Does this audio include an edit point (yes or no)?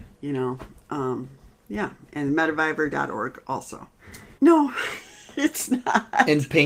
yes